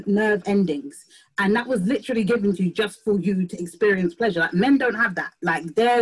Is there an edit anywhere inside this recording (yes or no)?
no